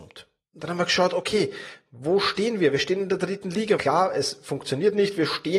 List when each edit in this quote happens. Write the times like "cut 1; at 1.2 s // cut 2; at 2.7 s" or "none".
cut 1; at 3.8 s